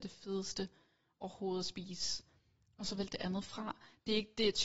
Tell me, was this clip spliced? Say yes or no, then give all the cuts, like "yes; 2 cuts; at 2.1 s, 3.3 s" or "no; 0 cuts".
no; 0 cuts